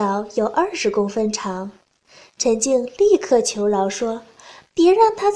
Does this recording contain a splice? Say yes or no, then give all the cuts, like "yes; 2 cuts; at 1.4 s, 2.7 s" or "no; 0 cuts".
no; 0 cuts